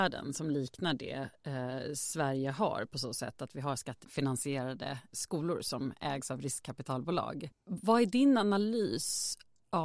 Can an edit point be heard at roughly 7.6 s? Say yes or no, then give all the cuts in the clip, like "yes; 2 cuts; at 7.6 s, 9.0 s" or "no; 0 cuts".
no; 1 cut; at 5.1 s